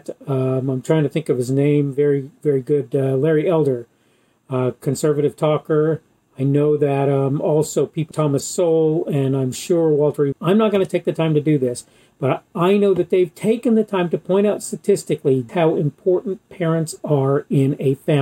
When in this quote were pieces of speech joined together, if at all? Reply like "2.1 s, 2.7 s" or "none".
8.1 s, 10.3 s, 15.5 s